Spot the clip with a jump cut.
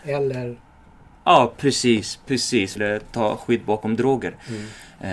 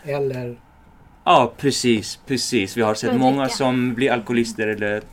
first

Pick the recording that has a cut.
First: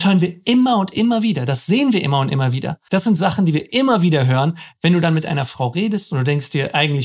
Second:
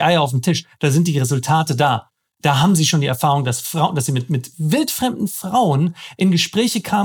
first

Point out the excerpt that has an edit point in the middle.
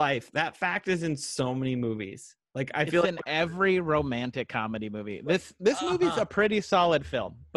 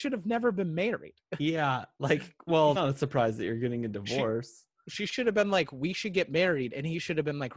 second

